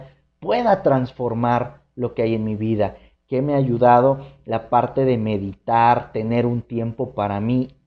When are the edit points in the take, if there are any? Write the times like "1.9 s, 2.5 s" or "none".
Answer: 3.1 s